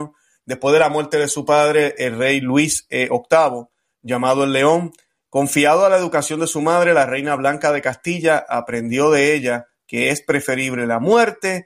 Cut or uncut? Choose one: uncut